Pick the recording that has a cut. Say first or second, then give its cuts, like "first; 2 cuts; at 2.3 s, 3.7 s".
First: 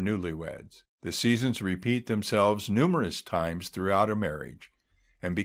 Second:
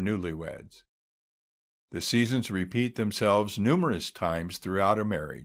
first; 1 cut; at 0.9 s